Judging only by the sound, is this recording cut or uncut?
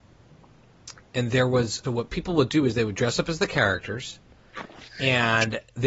cut